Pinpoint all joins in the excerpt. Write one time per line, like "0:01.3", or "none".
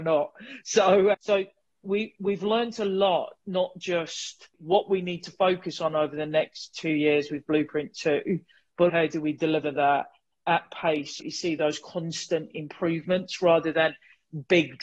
0:01.1
0:08.9
0:11.2